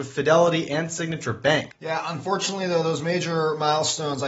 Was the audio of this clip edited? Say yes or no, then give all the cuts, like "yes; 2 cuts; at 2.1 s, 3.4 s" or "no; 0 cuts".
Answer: yes; 1 cut; at 1.7 s